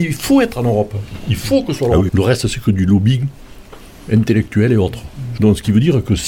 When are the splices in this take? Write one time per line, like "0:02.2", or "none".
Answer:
0:02.1
0:05.4